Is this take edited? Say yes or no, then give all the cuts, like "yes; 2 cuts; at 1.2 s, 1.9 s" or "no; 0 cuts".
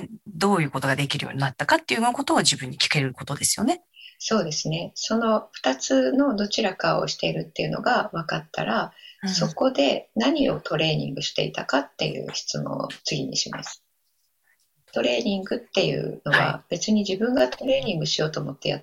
no; 0 cuts